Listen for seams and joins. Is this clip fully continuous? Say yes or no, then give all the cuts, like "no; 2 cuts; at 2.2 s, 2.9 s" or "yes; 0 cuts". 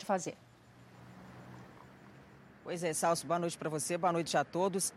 yes; 0 cuts